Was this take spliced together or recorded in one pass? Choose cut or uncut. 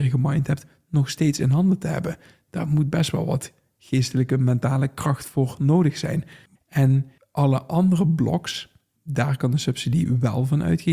cut